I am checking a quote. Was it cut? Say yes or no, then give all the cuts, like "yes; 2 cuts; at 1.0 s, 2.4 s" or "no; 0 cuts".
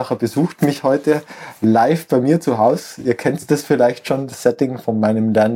no; 0 cuts